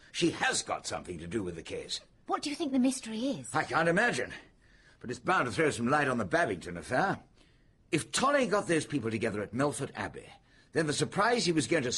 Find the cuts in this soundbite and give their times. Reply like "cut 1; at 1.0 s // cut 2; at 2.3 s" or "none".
none